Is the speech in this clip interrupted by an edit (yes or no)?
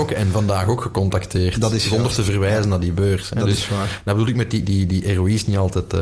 no